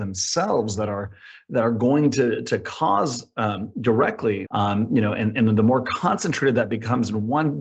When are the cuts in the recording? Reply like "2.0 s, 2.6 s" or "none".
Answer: 4.5 s